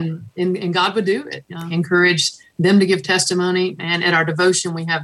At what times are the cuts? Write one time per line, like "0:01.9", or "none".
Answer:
0:01.7